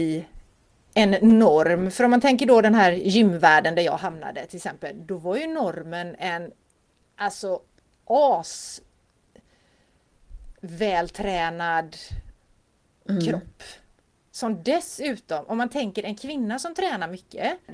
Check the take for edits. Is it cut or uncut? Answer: uncut